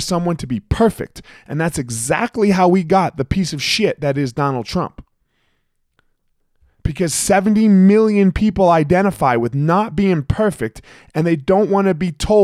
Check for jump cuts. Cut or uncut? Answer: uncut